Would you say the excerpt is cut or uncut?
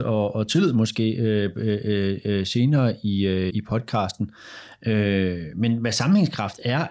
cut